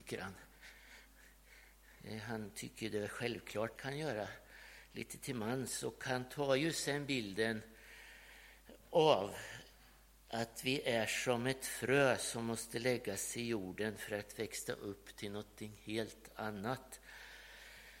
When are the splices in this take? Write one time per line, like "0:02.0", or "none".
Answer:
0:03.8